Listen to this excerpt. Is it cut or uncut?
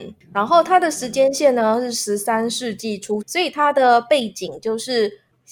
cut